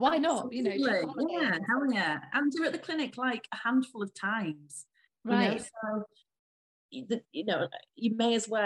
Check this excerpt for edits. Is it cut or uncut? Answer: uncut